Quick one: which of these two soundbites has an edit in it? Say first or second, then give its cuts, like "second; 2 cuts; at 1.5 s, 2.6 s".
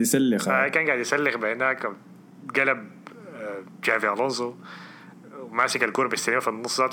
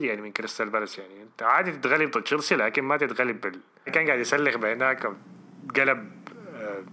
second; 1 cut; at 3.9 s